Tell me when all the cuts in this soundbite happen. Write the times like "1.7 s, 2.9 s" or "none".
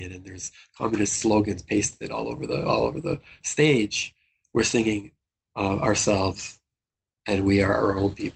none